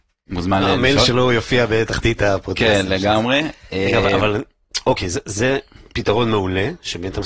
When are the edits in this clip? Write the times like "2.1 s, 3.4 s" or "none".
none